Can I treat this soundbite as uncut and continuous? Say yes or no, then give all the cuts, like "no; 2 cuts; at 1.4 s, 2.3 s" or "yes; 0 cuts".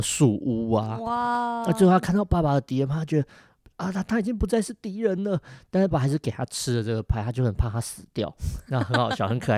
no; 1 cut; at 5.9 s